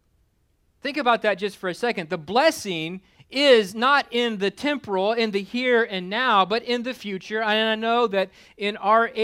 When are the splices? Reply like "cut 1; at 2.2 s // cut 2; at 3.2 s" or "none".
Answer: none